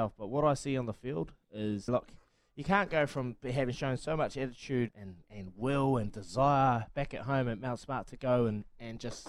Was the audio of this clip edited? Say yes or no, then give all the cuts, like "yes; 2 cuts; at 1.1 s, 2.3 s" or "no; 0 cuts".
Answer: yes; 2 cuts; at 1.9 s, 4.9 s